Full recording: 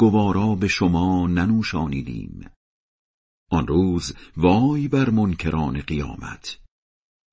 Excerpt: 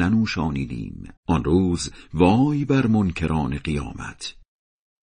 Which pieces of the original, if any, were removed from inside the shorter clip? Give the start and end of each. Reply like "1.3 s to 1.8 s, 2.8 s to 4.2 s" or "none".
2.5 s to 3.4 s